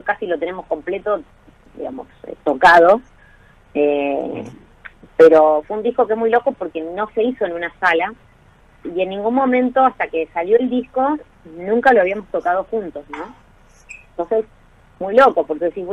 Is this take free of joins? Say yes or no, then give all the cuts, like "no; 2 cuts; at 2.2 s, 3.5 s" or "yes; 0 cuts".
yes; 0 cuts